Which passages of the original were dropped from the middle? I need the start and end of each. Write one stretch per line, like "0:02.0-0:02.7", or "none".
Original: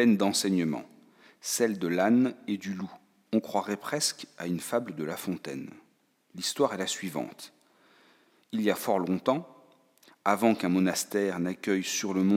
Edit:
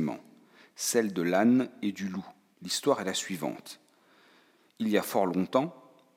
0:03.2-0:06.2